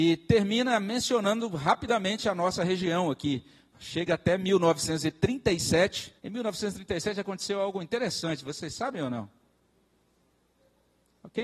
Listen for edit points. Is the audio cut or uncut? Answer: cut